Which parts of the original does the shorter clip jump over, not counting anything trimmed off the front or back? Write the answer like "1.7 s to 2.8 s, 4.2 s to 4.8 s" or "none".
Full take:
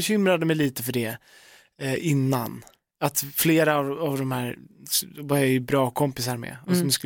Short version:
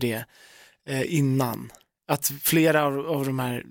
none

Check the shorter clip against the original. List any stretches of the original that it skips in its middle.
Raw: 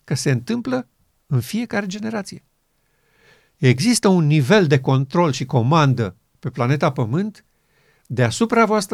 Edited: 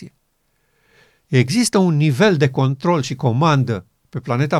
none

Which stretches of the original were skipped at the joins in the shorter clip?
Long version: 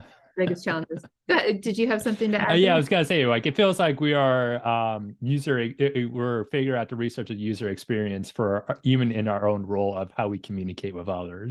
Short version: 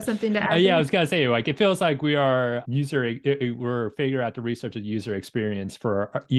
4.6 s to 5.2 s

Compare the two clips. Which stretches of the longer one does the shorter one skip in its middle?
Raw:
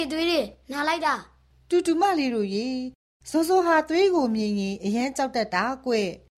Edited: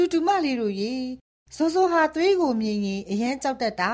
none

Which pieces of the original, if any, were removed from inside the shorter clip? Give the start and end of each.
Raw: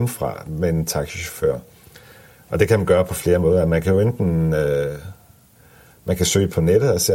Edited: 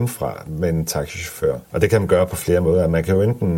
1.6 s to 2.4 s

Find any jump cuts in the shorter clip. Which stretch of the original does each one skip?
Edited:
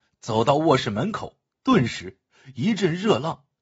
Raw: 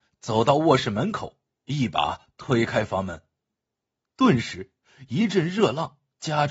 1.5 s to 4.0 s

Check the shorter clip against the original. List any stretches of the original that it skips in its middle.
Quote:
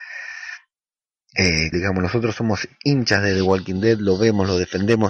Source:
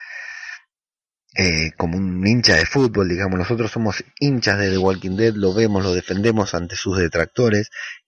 1.7 s to 3.1 s

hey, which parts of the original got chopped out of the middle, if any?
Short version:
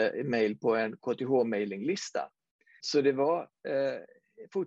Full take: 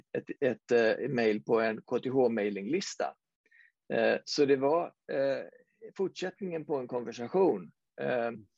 3.6 s to 4.2 s

